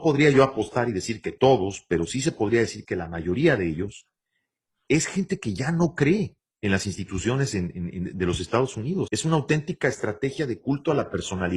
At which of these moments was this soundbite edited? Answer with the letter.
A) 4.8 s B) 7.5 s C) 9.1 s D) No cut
C